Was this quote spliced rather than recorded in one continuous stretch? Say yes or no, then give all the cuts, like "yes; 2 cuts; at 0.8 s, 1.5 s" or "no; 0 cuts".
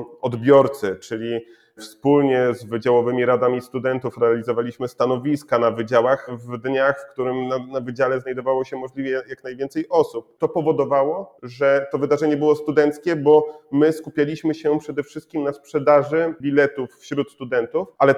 yes; 1 cut; at 10.4 s